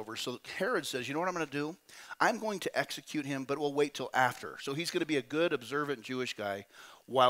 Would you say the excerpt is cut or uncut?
uncut